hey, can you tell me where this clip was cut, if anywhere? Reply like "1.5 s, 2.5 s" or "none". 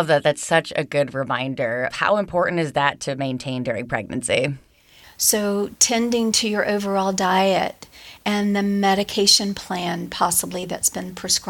1.9 s, 5.0 s

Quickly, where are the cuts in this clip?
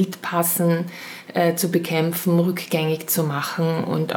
none

